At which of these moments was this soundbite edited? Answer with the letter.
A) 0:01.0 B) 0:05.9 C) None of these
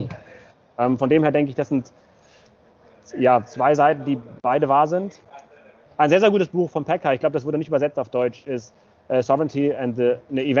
B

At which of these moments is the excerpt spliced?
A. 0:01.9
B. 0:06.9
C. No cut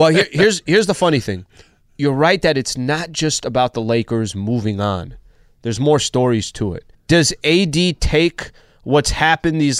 B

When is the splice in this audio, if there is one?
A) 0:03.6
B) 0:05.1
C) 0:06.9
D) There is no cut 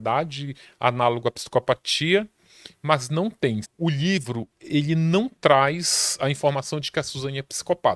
A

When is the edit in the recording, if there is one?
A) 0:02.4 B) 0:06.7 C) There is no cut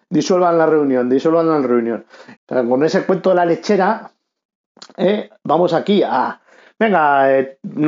A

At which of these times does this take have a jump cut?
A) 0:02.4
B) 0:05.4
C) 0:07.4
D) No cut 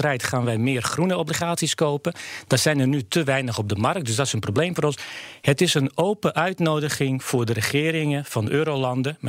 D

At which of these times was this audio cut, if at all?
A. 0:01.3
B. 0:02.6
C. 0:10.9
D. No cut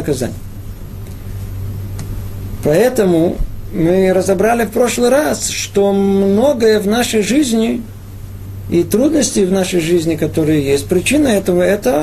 B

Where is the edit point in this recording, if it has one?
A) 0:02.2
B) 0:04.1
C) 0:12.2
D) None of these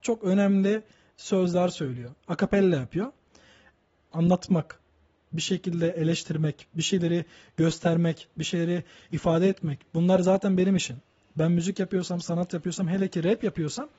B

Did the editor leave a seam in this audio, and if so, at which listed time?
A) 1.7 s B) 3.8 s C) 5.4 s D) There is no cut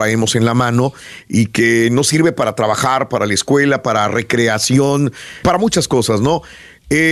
C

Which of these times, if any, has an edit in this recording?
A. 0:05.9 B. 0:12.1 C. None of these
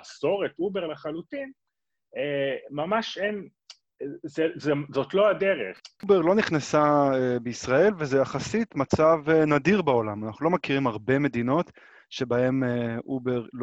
C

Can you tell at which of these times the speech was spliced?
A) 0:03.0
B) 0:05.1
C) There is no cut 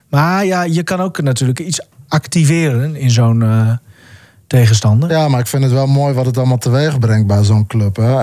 A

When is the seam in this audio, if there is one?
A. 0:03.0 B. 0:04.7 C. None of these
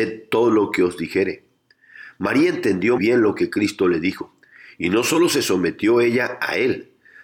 A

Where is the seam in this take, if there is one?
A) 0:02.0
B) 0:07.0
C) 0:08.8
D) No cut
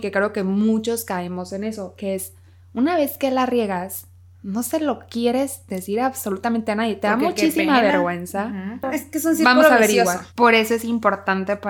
C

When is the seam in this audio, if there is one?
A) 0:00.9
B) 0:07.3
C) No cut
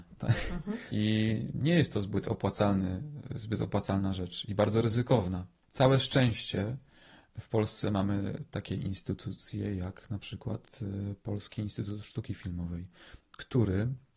A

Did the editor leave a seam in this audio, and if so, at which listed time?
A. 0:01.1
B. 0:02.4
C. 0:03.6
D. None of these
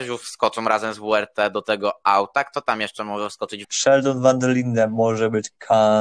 C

